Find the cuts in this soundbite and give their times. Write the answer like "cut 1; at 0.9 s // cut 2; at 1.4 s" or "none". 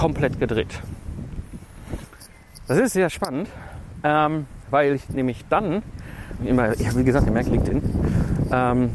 cut 1; at 6.4 s // cut 2; at 7.4 s